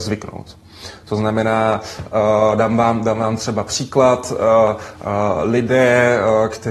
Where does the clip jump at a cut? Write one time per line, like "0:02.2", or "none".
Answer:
none